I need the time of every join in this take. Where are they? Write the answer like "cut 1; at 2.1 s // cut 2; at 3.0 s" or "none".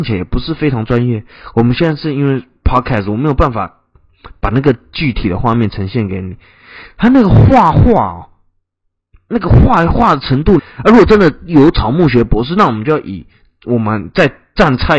cut 1; at 10.6 s

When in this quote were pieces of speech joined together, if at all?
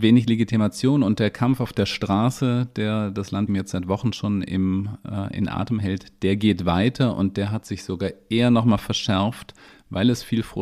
cut 1; at 3.5 s

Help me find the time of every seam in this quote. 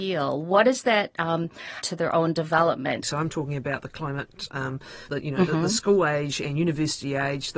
cut 1; at 1.8 s // cut 2; at 3.0 s // cut 3; at 5.1 s

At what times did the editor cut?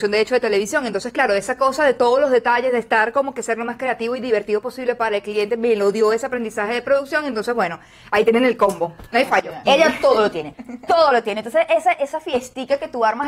cut 1; at 9.7 s // cut 2; at 11.9 s

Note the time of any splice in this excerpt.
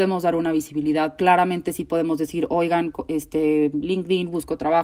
cut 1; at 1.2 s

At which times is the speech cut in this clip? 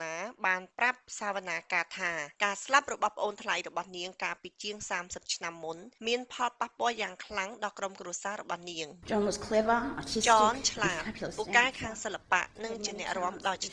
cut 1; at 2.3 s // cut 2; at 6.0 s

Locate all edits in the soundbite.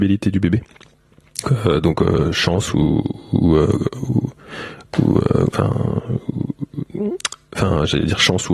cut 1; at 1.5 s

